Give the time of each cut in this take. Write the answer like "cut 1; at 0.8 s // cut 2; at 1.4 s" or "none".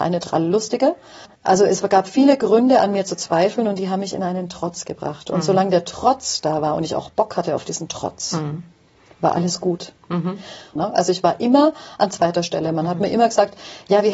cut 1; at 10.8 s